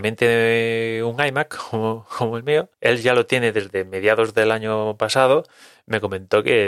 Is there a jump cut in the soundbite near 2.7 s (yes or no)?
yes